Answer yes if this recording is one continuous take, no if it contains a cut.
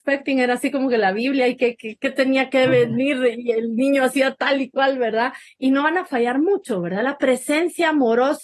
yes